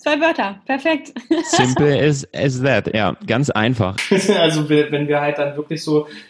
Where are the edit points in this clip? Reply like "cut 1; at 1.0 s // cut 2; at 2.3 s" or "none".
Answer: cut 1; at 4.0 s

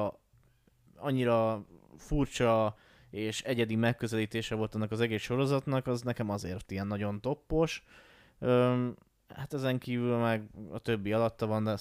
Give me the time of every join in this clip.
none

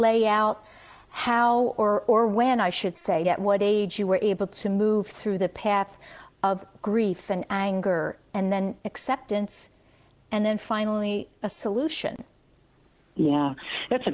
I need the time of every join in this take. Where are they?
cut 1; at 3.2 s

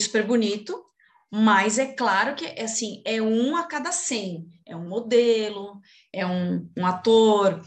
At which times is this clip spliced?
none

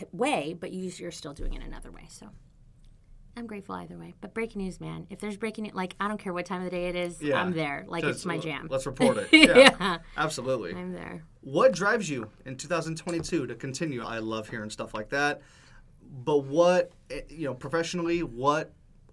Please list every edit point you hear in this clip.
cut 1; at 14.0 s // cut 2; at 17.6 s

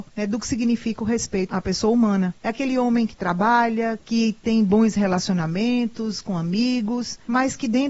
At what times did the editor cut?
cut 1; at 2.4 s // cut 2; at 4.0 s

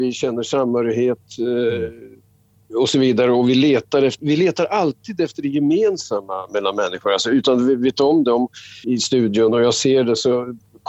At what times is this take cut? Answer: cut 1; at 4.2 s // cut 2; at 8.8 s

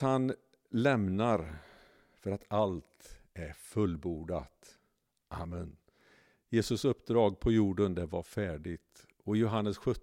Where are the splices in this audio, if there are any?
none

